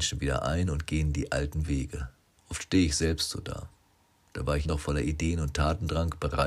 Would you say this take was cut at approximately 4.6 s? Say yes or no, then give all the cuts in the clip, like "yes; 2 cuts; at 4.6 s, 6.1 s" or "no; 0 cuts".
yes; 2 cuts; at 2.4 s, 4.6 s